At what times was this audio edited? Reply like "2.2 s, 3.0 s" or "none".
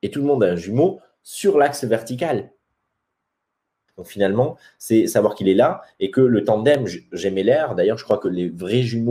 3.9 s